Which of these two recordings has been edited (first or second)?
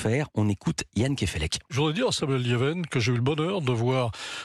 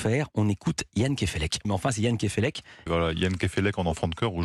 second